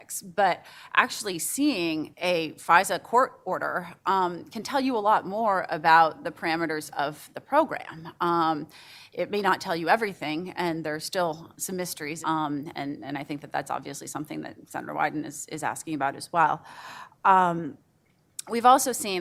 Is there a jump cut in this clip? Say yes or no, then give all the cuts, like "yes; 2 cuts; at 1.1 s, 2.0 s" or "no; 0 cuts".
yes; 1 cut; at 12.2 s